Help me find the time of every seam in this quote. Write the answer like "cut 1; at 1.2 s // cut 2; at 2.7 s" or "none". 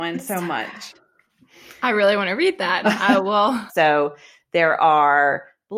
cut 1; at 3.7 s